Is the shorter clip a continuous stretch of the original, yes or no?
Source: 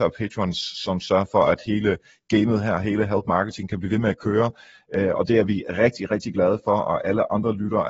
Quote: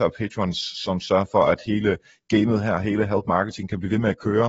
yes